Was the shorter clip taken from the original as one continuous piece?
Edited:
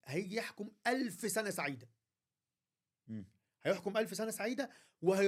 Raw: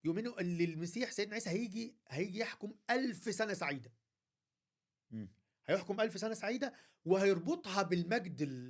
yes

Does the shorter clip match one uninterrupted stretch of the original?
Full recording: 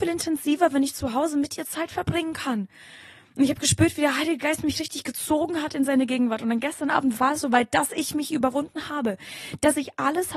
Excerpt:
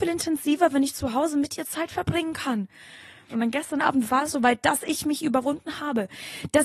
no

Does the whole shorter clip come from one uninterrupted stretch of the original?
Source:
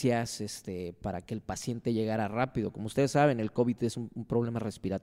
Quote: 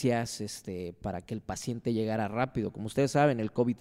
yes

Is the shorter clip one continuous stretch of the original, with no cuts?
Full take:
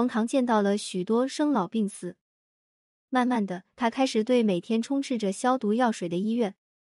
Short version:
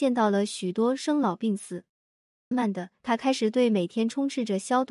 no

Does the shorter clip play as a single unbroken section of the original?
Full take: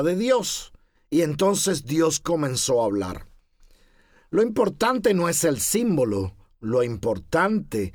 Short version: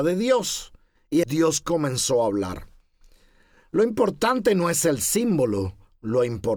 no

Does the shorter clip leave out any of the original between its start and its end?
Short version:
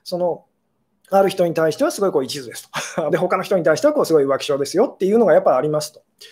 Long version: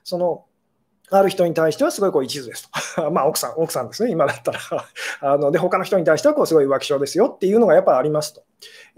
yes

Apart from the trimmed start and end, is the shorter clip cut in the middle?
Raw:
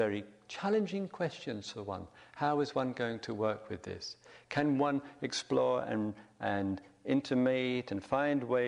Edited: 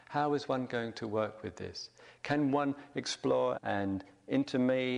yes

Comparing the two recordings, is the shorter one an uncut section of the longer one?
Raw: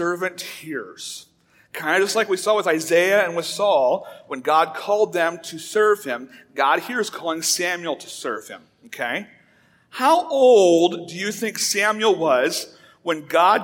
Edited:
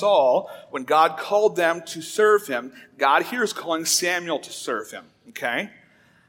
yes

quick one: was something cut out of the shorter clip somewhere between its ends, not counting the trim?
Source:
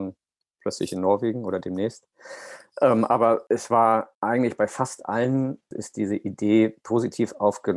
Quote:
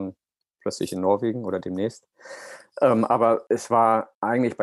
no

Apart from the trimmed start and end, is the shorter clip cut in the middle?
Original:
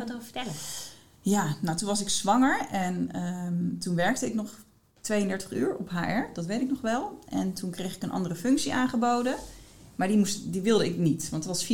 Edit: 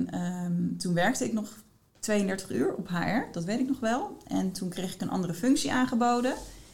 no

